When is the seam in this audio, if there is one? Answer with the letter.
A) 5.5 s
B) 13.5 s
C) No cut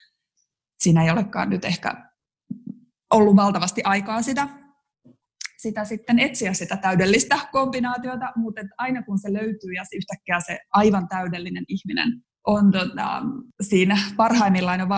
C